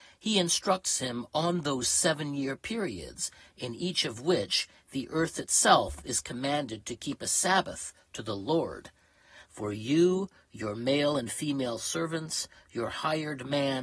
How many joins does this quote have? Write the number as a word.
one